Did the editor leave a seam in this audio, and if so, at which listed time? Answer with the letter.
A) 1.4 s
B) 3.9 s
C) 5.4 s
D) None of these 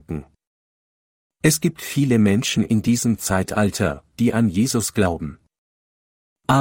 D